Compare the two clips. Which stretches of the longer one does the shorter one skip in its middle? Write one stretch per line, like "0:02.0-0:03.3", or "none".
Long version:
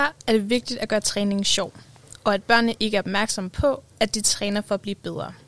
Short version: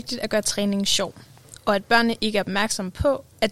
none